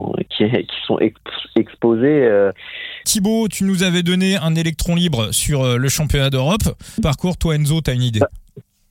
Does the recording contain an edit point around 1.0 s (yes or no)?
no